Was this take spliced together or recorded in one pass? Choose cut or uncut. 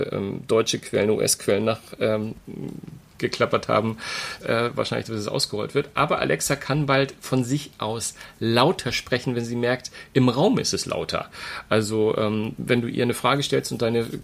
cut